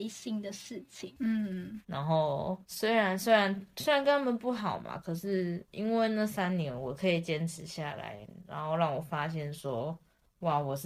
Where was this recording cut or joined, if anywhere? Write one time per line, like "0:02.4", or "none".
0:01.2